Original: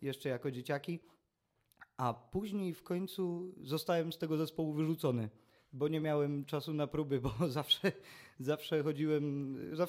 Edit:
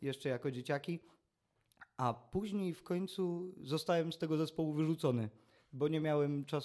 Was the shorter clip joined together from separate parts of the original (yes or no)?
no